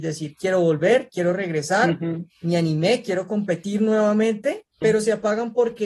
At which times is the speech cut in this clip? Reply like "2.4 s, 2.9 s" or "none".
4.8 s